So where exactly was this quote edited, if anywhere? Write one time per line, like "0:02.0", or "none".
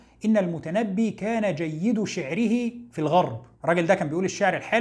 0:03.5